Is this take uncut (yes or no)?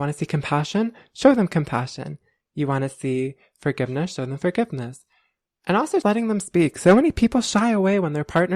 no